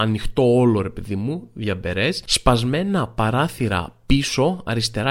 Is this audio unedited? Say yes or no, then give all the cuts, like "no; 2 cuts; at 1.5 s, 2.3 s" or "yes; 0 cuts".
yes; 0 cuts